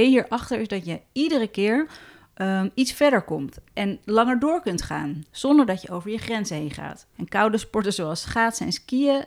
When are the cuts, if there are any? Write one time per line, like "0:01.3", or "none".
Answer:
0:07.1